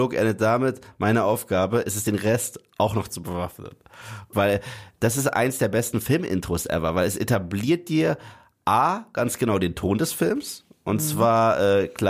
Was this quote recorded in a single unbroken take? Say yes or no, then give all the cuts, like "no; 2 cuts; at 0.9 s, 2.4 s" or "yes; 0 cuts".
no; 1 cut; at 4.3 s